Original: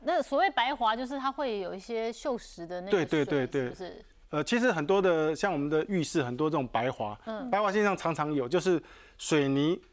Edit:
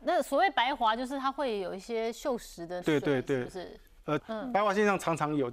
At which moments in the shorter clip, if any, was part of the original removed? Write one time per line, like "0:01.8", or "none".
0:02.8
0:04.2